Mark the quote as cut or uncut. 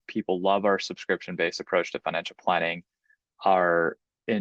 uncut